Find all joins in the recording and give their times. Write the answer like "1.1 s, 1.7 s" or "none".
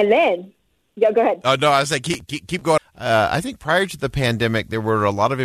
2.8 s

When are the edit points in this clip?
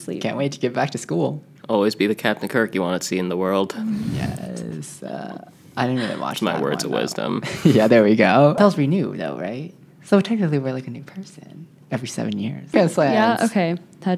8.6 s, 12.7 s

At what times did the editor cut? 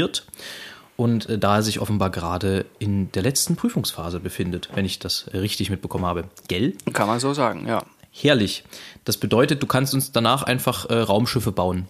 none

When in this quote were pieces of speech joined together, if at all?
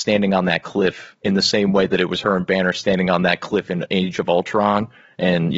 none

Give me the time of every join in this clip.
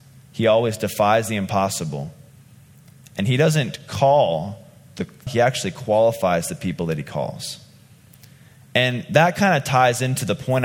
5.3 s

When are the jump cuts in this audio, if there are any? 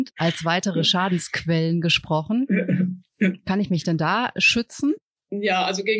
none

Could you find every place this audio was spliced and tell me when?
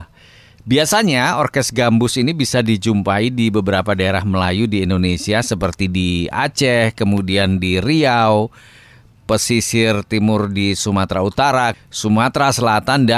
11.7 s

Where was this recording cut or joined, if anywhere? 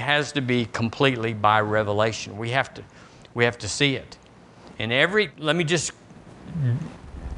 5.3 s

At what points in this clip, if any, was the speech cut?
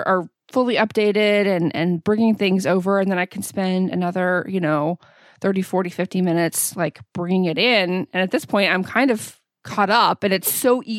none

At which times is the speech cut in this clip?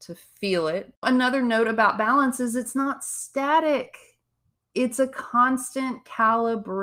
1.0 s

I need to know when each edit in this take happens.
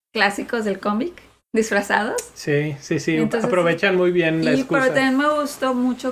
none

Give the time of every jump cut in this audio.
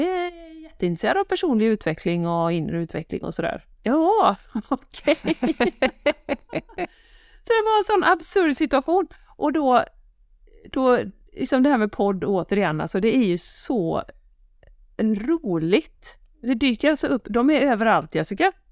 3.7 s

